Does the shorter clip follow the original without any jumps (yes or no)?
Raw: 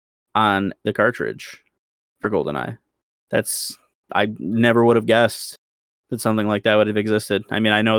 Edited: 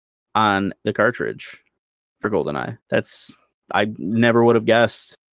no